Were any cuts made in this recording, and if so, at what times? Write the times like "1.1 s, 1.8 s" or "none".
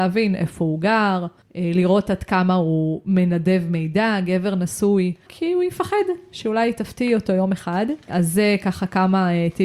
5.3 s